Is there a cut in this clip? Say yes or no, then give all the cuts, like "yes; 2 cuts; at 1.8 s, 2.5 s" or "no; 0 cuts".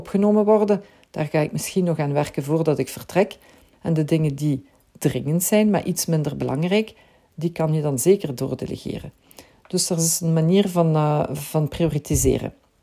yes; 1 cut; at 3.7 s